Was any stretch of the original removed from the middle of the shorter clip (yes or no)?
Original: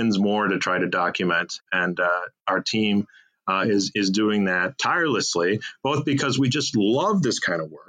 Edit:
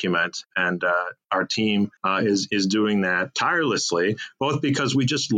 yes